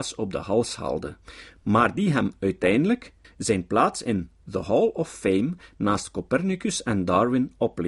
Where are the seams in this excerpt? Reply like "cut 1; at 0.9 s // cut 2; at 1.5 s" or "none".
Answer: cut 1; at 3.2 s